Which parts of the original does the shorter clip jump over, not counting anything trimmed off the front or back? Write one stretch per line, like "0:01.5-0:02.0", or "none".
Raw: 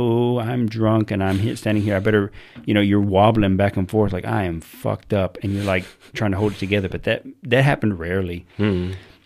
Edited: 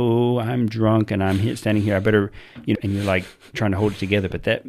0:02.7-0:05.3

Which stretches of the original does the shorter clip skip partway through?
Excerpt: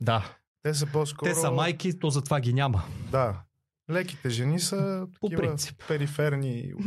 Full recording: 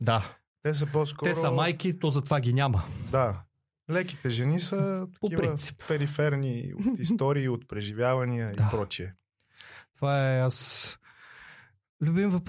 none

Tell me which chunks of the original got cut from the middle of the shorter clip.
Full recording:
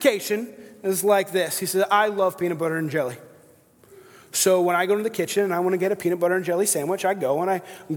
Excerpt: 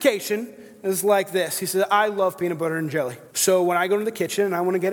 0:03.3-0:04.3

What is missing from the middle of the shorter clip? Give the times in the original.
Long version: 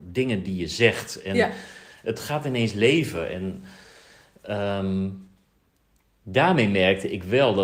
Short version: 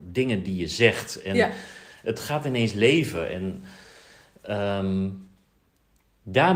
none

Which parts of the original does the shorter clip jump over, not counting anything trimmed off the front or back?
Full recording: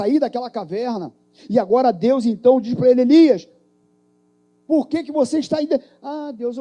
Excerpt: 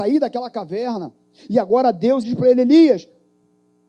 0:02.2-0:02.6

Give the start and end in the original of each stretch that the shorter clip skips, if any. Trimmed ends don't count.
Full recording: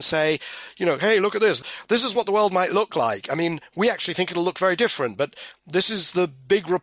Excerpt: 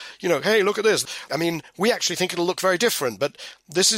0:01.9-0:03.3

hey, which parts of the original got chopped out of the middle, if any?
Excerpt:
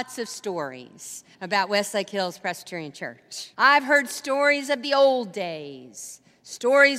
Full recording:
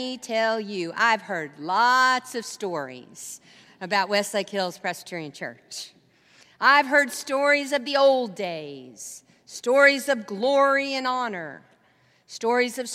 0:03.5-0:03.7
0:05.9-0:06.6

